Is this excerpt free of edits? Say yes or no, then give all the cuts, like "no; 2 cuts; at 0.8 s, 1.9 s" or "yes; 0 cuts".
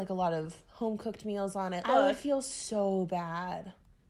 no; 1 cut; at 1.8 s